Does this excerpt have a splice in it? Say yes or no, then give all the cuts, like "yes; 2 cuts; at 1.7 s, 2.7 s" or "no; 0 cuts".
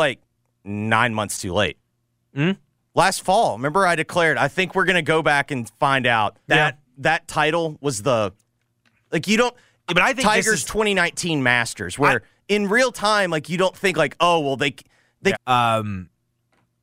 yes; 3 cuts; at 6.5 s, 9.9 s, 15.3 s